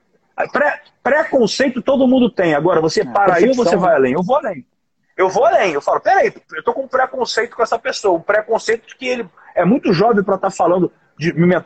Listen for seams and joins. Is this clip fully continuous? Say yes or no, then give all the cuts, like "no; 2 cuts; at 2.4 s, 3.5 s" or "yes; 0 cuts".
yes; 0 cuts